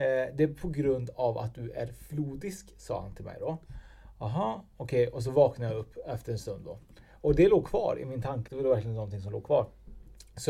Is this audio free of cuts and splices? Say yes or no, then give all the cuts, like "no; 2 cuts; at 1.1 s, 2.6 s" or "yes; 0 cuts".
no; 1 cut; at 8.5 s